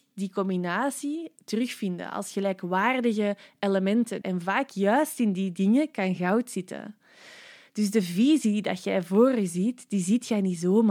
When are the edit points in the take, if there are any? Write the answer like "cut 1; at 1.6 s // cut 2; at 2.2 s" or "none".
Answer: cut 1; at 4.2 s